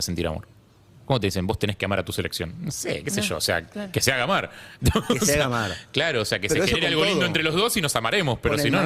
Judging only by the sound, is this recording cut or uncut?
uncut